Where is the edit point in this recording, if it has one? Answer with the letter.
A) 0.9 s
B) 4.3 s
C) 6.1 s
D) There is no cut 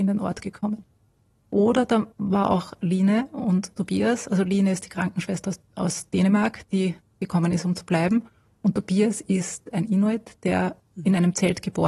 D